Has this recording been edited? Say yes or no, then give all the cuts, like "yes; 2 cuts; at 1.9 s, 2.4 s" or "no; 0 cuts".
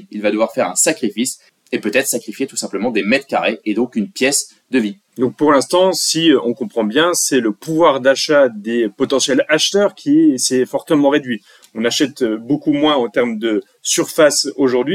yes; 1 cut; at 5.1 s